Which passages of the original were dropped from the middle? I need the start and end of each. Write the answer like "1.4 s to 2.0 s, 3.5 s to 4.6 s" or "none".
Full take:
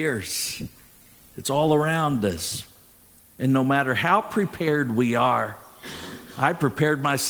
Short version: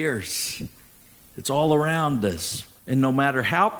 2.8 s to 3.3 s